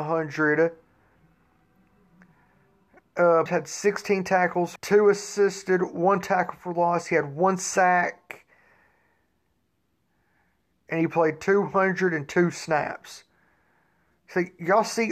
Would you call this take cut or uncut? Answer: cut